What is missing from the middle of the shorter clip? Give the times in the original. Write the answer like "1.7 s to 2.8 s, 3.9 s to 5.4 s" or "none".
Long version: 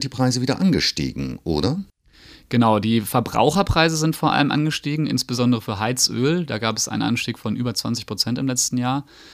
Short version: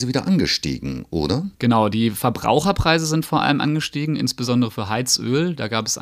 1.9 s to 2.5 s